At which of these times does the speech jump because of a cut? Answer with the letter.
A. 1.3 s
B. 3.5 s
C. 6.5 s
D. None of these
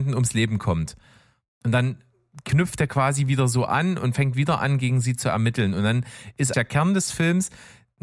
C